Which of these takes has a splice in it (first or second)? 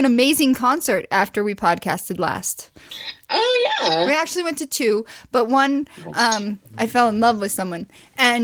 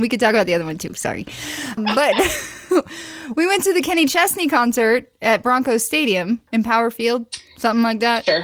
second